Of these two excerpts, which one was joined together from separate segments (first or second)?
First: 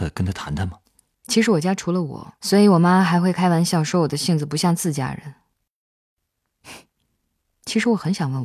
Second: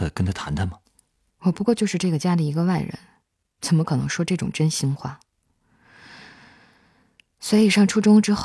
first